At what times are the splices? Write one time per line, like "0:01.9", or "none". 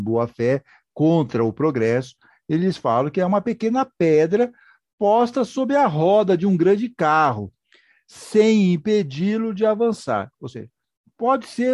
none